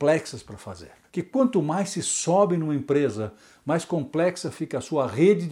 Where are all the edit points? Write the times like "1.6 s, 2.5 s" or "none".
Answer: 1.1 s